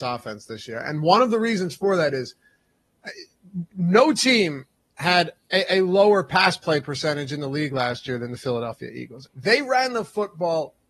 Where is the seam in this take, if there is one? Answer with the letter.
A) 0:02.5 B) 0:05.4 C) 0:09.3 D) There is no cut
C